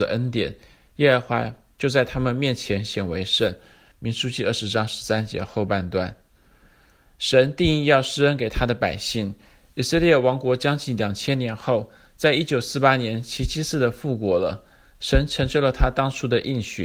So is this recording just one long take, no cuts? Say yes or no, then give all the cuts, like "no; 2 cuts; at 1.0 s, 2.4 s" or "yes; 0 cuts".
yes; 0 cuts